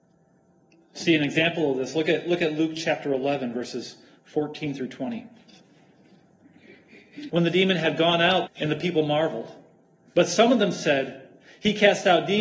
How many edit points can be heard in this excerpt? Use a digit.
2